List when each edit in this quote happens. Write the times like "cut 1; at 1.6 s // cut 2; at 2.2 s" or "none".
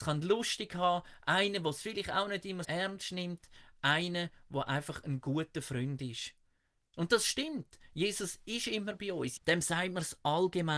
cut 1; at 2.6 s // cut 2; at 9.4 s